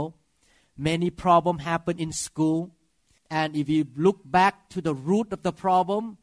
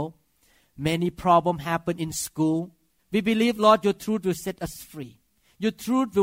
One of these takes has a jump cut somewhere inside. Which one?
second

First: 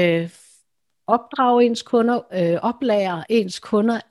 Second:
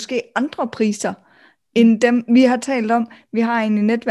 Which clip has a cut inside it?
first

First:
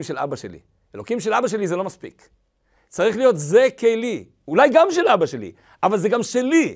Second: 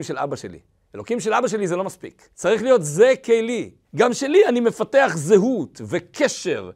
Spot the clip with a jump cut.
second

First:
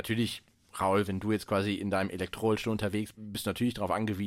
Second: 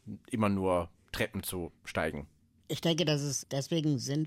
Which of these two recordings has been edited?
first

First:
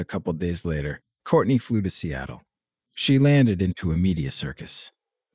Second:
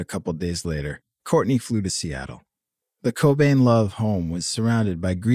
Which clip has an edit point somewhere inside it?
second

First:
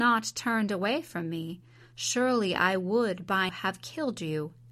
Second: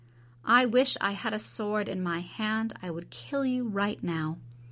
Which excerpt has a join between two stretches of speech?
first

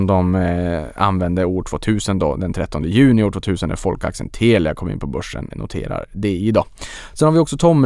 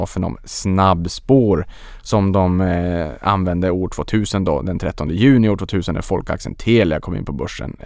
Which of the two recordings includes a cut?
first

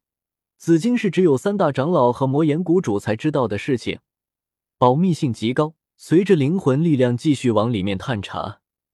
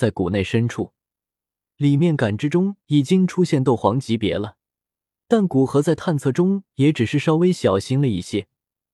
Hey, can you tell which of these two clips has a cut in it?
first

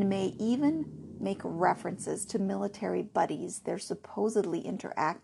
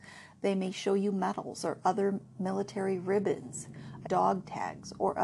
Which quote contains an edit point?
second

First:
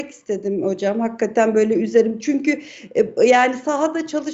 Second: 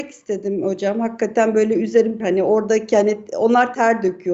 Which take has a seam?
second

